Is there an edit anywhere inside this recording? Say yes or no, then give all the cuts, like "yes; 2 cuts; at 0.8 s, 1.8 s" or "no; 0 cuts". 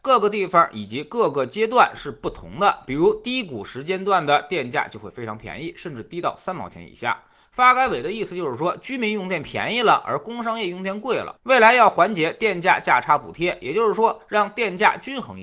no; 0 cuts